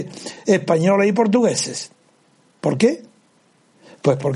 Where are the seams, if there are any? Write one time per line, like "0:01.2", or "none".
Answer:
none

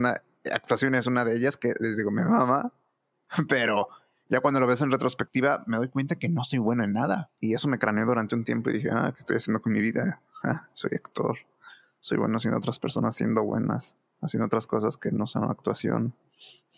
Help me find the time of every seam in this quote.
0:07.4

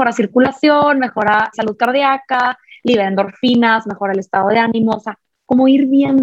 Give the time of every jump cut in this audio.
0:01.5

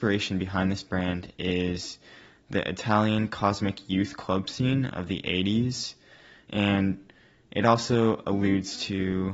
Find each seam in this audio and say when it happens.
none

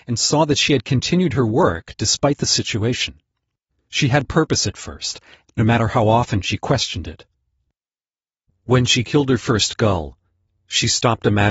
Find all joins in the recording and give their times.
0:05.4

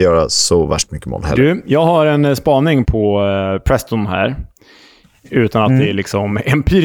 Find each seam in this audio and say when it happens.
0:02.9

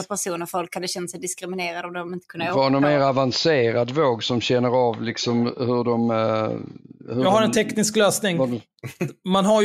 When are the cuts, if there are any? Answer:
none

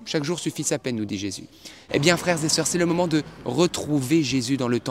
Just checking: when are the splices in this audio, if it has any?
0:01.9

